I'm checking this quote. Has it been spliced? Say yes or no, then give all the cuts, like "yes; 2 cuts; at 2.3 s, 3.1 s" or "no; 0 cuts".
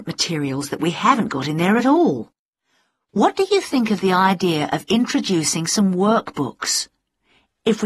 no; 0 cuts